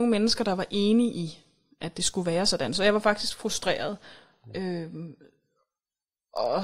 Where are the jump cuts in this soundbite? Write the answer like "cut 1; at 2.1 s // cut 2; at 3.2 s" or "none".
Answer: none